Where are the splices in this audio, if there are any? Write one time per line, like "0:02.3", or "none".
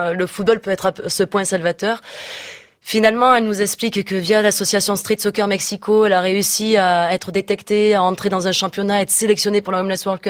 none